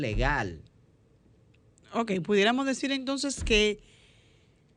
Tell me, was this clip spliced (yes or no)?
no